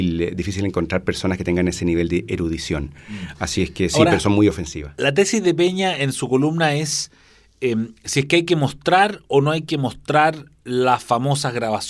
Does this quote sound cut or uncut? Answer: uncut